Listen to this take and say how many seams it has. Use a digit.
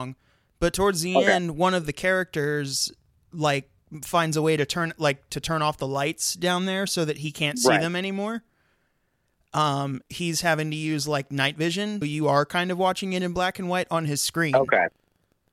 2